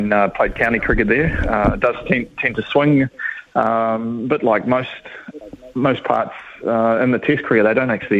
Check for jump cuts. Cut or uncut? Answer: uncut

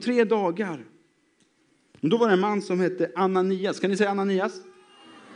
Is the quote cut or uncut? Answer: cut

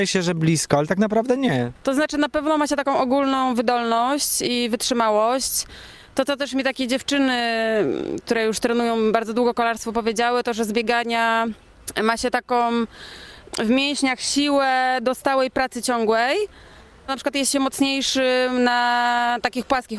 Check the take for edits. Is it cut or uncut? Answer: cut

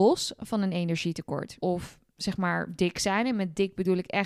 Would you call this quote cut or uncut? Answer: cut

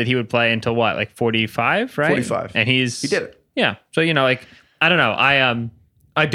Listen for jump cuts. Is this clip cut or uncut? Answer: uncut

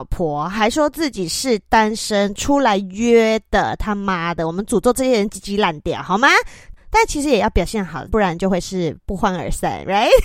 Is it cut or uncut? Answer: cut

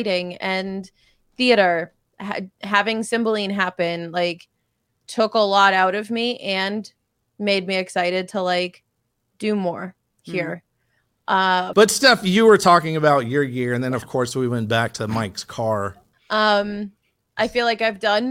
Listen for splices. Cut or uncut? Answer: cut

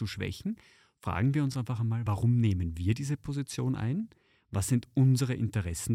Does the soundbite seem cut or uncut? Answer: uncut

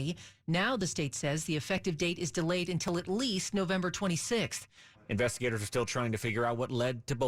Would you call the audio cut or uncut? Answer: cut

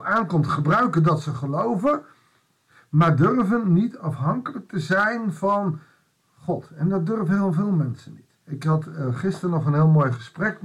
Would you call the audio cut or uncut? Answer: cut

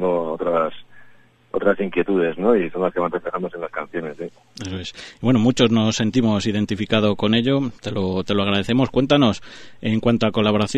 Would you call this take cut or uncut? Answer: uncut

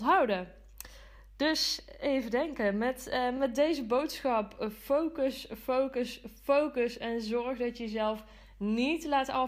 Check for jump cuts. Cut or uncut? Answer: uncut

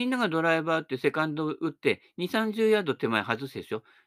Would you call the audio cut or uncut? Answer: uncut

